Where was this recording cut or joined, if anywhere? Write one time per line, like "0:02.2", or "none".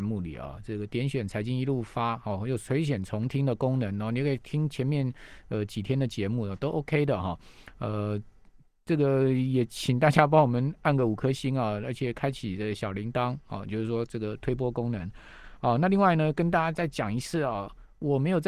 none